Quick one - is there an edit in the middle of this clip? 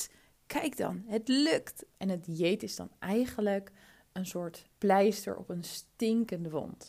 yes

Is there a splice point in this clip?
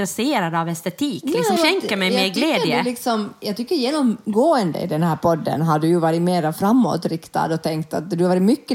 yes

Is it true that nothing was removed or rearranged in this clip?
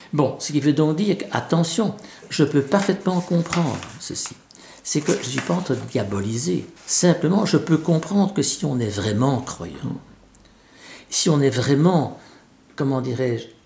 no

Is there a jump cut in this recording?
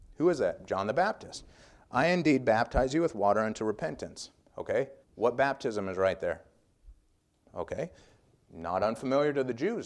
yes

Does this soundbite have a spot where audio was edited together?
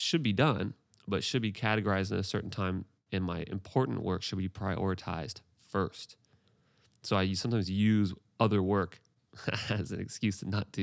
no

